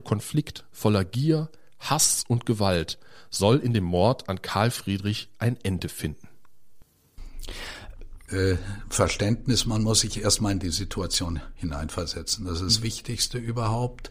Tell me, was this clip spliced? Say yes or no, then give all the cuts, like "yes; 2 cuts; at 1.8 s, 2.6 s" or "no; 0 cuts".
yes; 1 cut; at 8.3 s